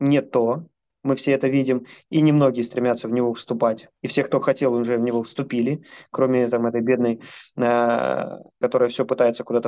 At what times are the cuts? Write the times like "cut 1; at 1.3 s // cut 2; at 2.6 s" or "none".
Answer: cut 1; at 4.0 s // cut 2; at 8.6 s